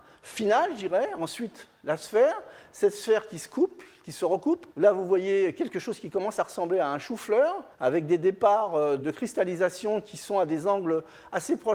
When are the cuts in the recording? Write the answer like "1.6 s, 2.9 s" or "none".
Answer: 4.7 s, 7.7 s, 9.0 s